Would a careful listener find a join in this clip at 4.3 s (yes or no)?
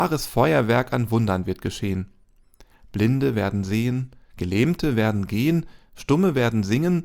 yes